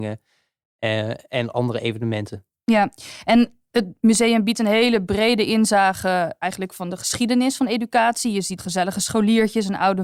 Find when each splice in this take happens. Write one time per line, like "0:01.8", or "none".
0:08.6